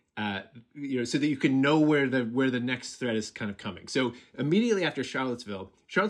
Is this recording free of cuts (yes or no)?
yes